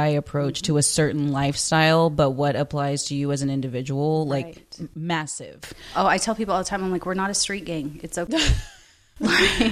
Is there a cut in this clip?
no; 0 cuts

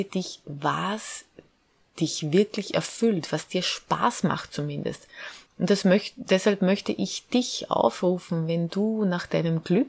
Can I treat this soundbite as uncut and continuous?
no; 1 cut; at 5.5 s

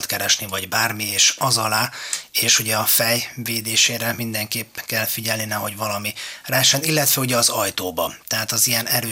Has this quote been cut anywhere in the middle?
no; 0 cuts

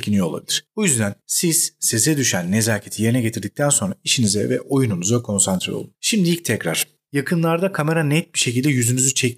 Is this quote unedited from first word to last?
no; 1 cut; at 7.1 s

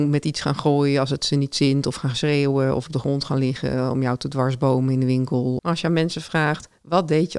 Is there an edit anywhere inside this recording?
yes; 1 cut; at 5.6 s

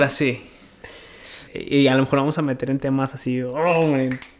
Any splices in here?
yes; 1 cut; at 1.5 s

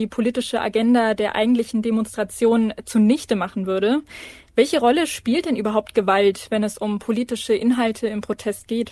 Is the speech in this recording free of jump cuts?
yes; 0 cuts

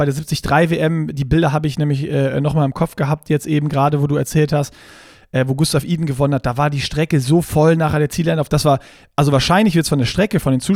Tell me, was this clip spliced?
no; 0 cuts

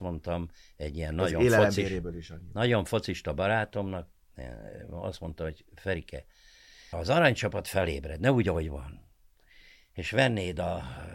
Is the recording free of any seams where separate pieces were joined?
no; 1 cut; at 6.9 s

